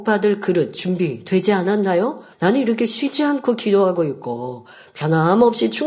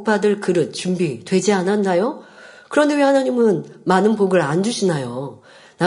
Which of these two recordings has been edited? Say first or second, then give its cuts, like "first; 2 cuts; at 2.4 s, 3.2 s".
first; 1 cut; at 2.3 s